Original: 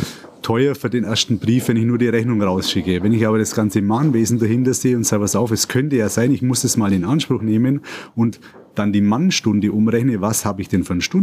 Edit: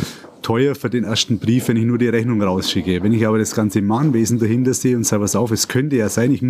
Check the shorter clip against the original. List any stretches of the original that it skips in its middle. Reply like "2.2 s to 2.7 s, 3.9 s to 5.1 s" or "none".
none